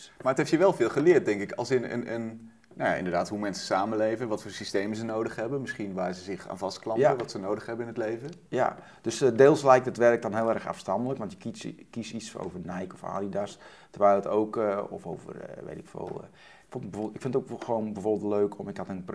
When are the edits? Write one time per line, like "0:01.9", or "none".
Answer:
none